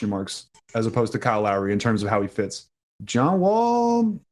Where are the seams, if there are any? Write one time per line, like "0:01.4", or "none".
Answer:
0:03.0

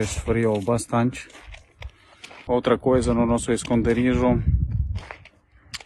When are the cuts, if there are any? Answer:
0:02.5

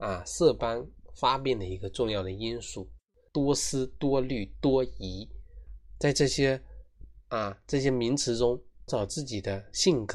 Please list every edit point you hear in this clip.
0:03.3
0:05.7
0:08.9

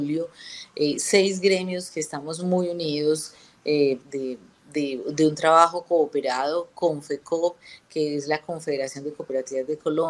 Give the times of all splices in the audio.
0:04.0

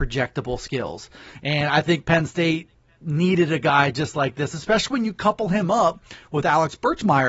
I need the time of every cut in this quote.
none

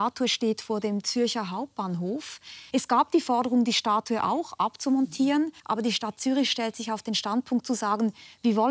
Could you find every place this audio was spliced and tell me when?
0:02.7
0:05.6

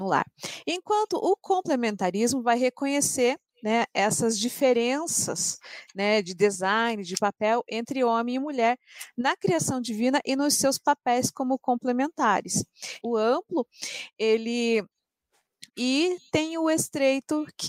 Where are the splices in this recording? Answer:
0:13.0
0:15.7

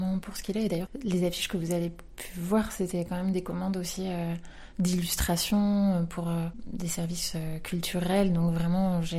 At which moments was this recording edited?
none

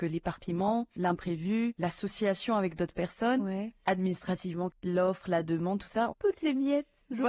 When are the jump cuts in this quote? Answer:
0:04.7
0:06.1

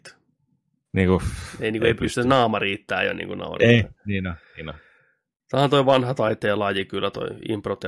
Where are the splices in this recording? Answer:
none

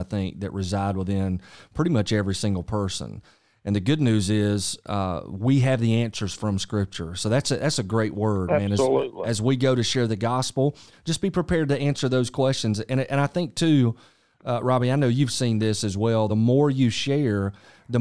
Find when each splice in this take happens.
none

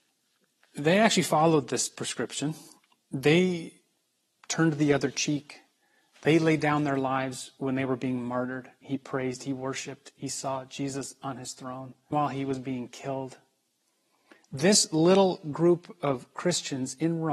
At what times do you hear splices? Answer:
0:08.8
0:12.1

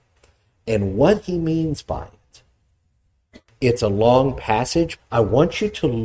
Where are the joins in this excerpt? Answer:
0:03.5
0:05.0

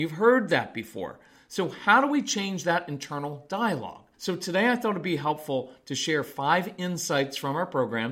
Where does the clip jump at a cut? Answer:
0:04.1

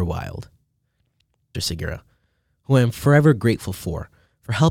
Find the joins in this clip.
0:01.5

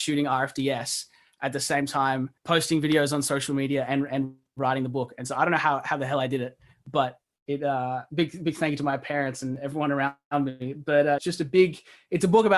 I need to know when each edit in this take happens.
0:02.4
0:11.2

